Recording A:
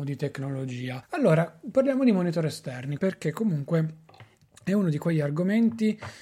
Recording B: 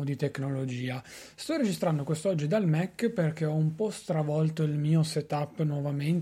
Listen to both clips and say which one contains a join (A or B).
A